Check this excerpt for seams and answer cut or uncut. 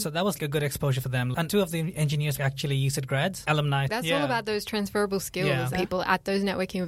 cut